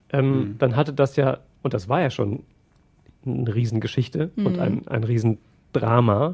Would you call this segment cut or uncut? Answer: uncut